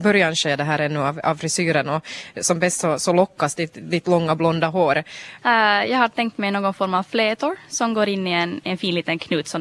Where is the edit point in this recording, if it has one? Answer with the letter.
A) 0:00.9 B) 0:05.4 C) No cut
B